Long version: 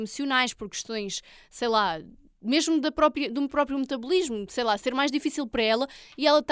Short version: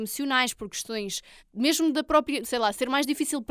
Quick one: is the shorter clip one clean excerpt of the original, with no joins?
no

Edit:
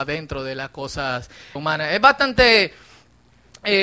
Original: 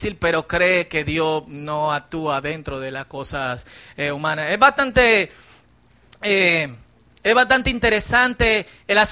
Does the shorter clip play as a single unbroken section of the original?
no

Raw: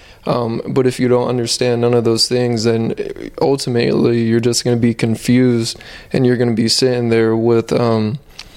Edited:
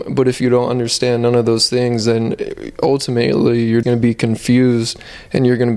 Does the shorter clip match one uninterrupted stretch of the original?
no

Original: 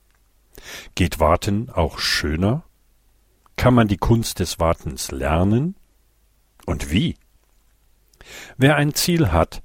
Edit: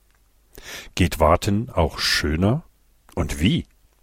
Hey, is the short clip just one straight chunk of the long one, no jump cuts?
no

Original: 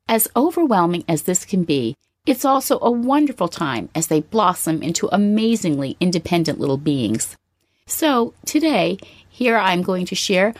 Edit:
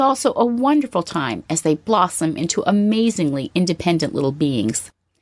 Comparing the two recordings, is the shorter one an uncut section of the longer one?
yes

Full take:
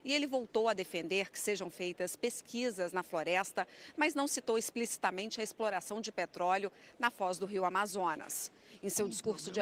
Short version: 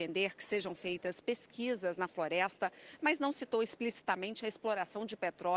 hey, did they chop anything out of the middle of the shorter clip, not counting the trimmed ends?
no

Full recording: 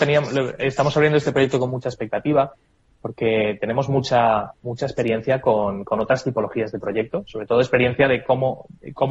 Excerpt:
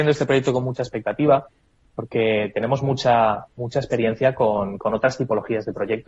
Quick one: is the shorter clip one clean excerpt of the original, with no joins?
yes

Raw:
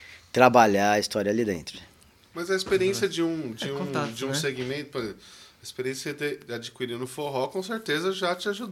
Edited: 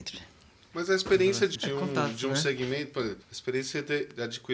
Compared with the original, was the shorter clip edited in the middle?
yes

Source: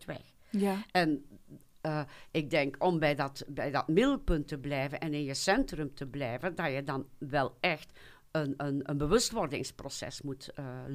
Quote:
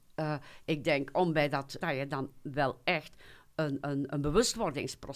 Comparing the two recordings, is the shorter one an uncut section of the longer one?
no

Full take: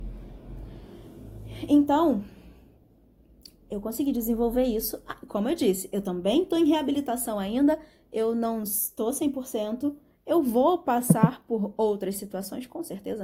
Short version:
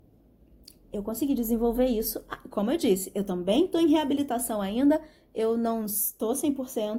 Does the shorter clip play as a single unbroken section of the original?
yes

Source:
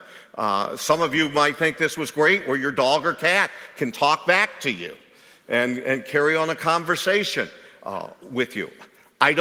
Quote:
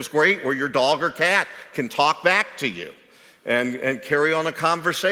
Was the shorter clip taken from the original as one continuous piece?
yes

